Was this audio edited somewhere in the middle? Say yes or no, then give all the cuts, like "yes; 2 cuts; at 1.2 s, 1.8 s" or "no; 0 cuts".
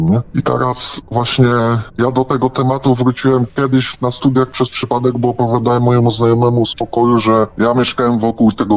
no; 0 cuts